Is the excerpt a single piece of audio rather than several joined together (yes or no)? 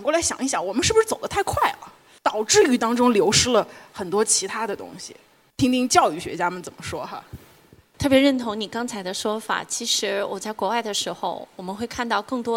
yes